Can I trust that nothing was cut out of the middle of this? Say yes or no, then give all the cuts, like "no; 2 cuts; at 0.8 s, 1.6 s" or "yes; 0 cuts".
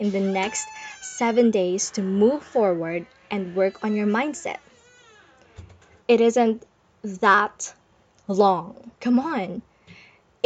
no; 2 cuts; at 6.0 s, 8.9 s